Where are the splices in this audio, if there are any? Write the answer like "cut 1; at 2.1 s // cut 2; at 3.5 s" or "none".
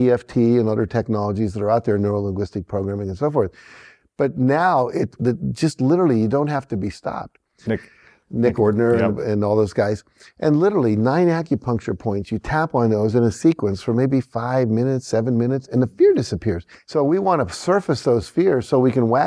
cut 1; at 5.2 s // cut 2; at 7.7 s // cut 3; at 16.8 s

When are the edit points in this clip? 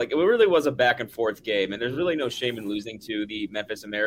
none

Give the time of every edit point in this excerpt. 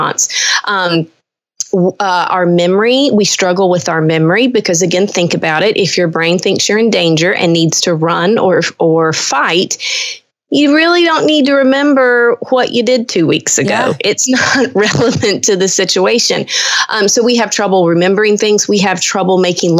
none

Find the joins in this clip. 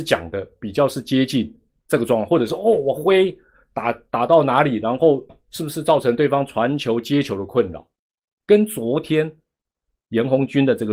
none

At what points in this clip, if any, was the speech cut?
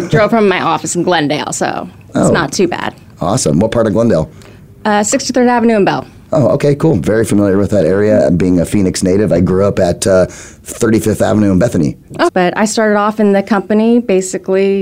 cut 1; at 12.3 s

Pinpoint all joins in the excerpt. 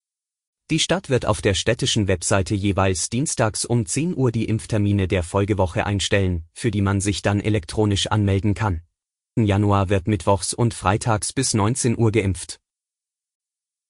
cut 1; at 9.4 s

